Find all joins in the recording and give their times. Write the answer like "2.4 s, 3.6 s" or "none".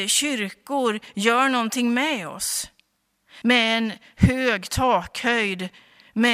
3.4 s